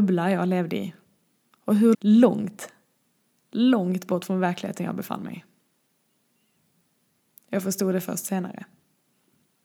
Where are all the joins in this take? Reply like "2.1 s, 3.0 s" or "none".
1.9 s